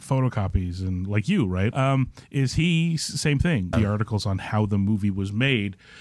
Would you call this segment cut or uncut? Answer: cut